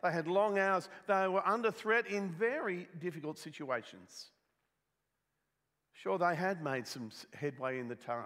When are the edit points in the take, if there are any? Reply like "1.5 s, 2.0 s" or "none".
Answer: none